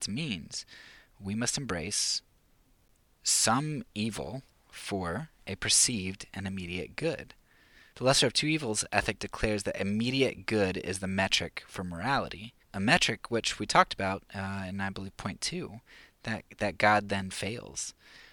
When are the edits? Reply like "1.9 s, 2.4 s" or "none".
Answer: 7.9 s, 12.6 s

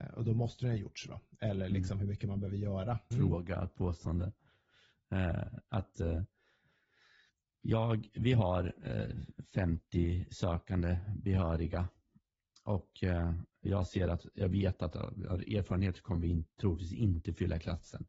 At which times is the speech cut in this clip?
1.1 s, 3.1 s

